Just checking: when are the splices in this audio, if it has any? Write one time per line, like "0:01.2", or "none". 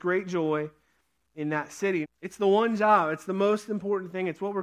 0:02.0